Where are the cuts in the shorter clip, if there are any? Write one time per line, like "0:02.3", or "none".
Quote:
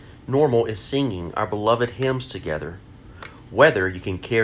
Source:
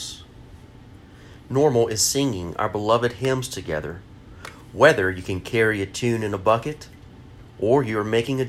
none